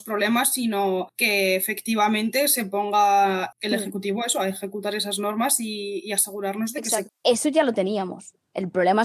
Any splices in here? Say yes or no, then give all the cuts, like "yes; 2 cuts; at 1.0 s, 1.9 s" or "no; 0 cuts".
yes; 2 cuts; at 3.5 s, 7.1 s